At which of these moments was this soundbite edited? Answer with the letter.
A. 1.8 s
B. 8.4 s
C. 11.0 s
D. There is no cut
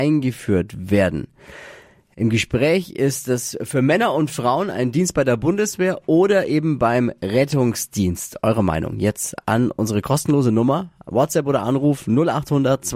D